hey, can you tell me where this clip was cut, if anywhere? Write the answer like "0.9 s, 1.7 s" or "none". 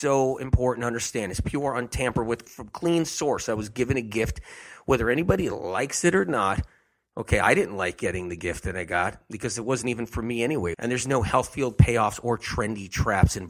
2.5 s, 10.7 s